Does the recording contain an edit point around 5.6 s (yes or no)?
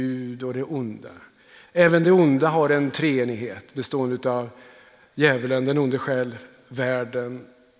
no